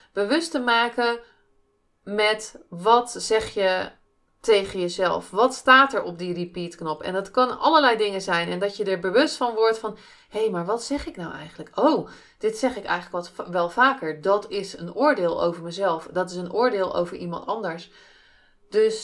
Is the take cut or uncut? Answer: uncut